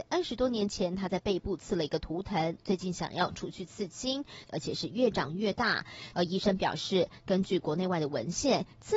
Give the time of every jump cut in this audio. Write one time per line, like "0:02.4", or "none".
0:04.5
0:06.1